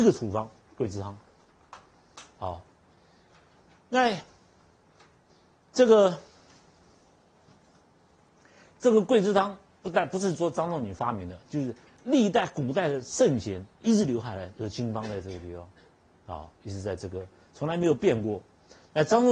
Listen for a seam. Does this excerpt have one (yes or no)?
no